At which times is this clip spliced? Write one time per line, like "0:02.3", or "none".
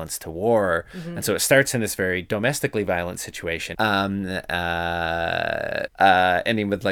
0:03.7
0:05.9